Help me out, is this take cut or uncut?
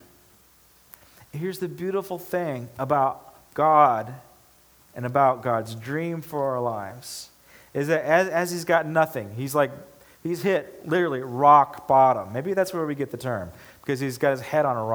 uncut